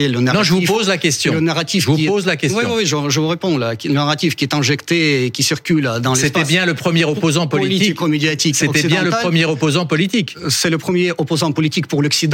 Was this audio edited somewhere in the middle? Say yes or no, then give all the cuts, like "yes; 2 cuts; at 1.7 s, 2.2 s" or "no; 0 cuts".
no; 0 cuts